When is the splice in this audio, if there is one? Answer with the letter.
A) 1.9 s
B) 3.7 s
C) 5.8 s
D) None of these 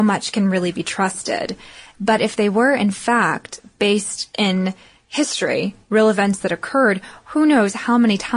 A